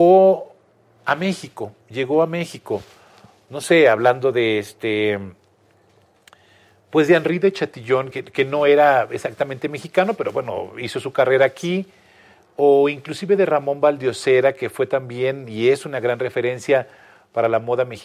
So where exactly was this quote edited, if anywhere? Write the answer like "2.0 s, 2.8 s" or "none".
8.1 s